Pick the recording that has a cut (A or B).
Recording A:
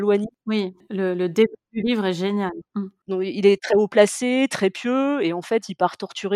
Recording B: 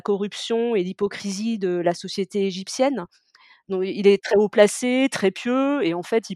B